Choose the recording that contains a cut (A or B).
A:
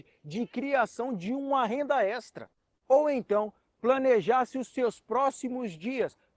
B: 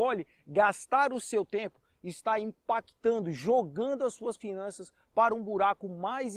A